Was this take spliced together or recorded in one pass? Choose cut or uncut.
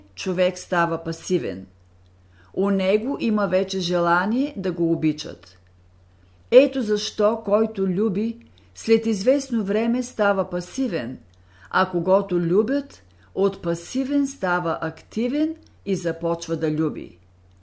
uncut